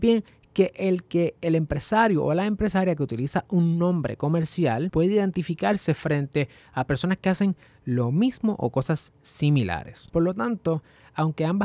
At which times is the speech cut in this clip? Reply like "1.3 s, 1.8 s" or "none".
none